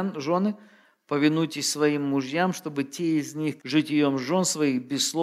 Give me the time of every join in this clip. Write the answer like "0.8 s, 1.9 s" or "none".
3.6 s